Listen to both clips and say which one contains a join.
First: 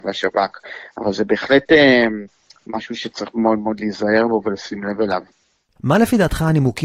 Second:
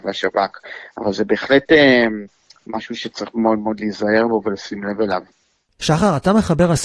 first; 1 cut; at 5.8 s

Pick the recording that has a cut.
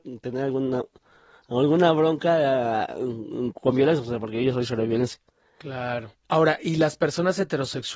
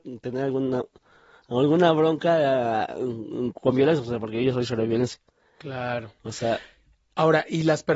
first; 1 cut; at 6.1 s

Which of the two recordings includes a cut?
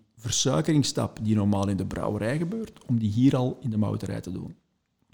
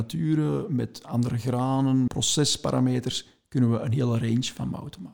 second; 1 cut; at 2.1 s

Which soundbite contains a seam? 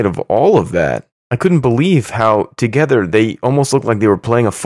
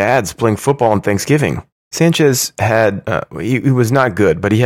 second; 1 cut; at 1.8 s

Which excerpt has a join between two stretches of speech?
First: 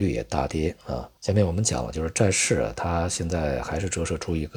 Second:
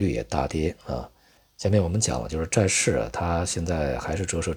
first; 1 cut; at 1.2 s

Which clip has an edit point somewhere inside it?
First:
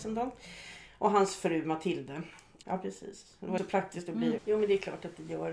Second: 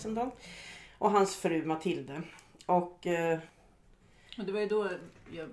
first; 2 cuts; at 2.6 s, 4.4 s

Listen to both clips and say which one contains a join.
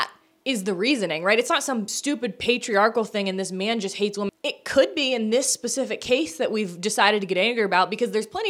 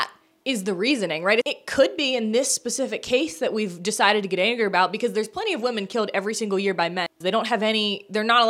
second; 2 cuts; at 1.4 s, 7.2 s

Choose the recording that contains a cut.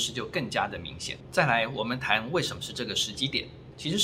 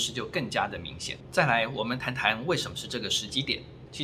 first; 1 cut; at 2.0 s

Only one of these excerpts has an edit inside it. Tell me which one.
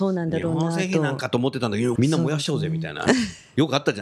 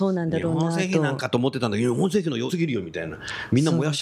first; 1 cut; at 2.0 s

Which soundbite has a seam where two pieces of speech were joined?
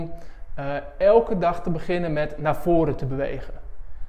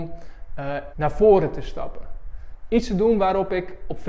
second; 2 cuts; at 0.9 s, 2.7 s

